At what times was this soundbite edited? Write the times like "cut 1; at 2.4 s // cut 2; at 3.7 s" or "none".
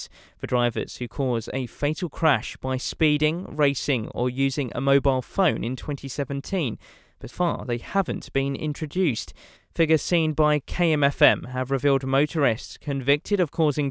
cut 1; at 7.3 s // cut 2; at 9.6 s

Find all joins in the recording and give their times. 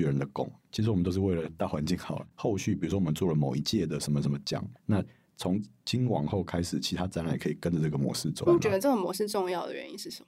cut 1; at 2.3 s // cut 2; at 4.7 s // cut 3; at 8.5 s

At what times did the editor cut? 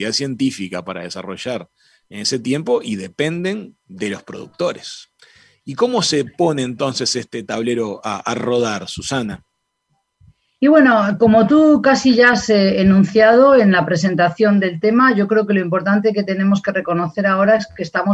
none

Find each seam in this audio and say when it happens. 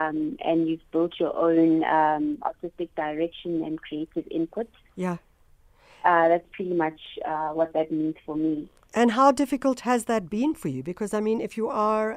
none

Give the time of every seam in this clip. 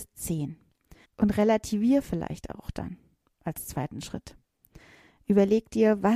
cut 1; at 1.0 s

